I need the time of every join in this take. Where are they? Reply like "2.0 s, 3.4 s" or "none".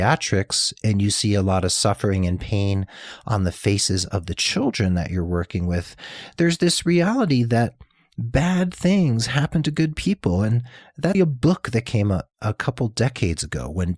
11.1 s